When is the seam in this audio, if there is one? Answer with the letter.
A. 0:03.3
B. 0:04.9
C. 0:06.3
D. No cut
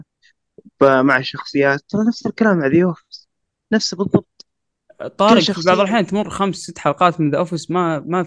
D